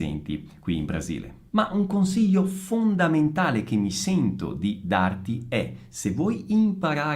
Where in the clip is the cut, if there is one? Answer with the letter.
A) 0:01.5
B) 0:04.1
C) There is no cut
A